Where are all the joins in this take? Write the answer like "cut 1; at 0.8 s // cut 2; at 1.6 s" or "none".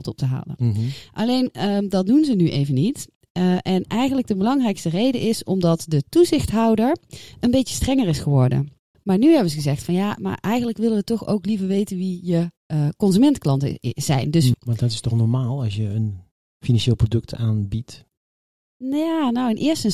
cut 1; at 8.9 s // cut 2; at 14.5 s